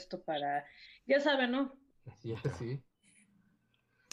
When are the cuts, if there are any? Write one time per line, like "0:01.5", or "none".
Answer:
0:01.9